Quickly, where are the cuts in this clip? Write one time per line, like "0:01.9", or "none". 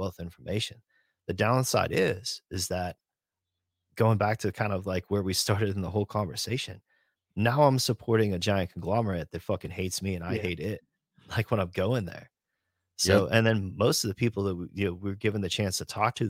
none

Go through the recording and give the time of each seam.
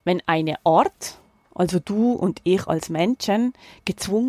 none

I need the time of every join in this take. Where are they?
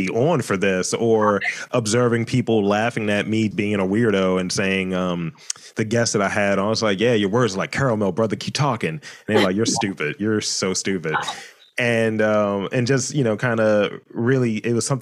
0:03.5

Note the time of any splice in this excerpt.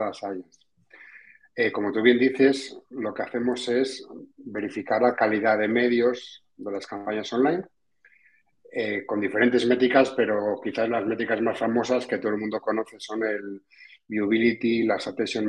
none

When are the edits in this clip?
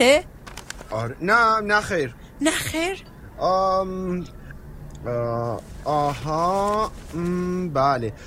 none

